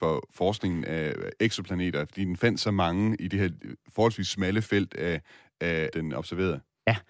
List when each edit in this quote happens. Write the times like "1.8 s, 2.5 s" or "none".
5.9 s